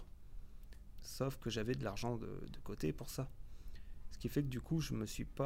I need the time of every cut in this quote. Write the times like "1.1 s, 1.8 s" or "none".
0.9 s